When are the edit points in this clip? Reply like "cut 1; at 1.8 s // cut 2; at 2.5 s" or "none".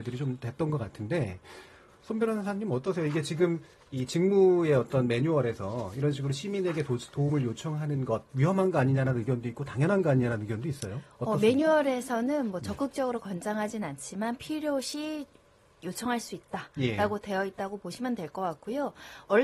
none

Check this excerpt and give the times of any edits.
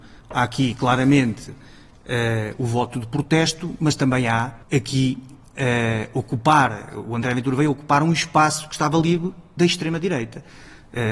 cut 1; at 4.6 s

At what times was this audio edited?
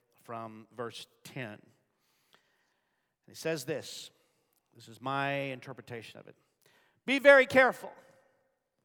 none

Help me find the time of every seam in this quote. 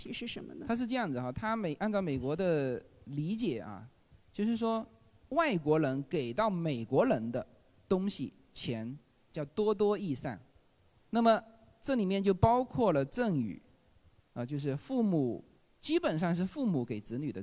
none

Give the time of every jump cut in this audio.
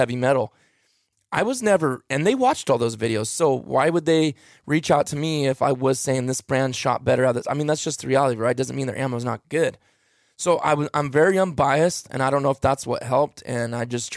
none

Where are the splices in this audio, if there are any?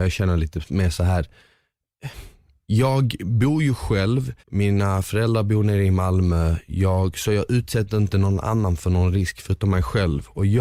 cut 1; at 4.4 s

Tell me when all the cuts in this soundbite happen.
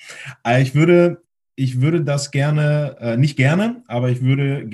none

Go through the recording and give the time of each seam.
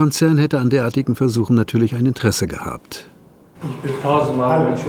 cut 1; at 3.5 s

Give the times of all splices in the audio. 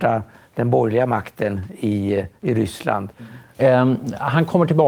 cut 1; at 3.5 s

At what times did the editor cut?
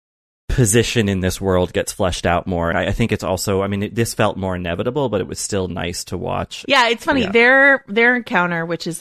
cut 1; at 2.7 s // cut 2; at 6.7 s

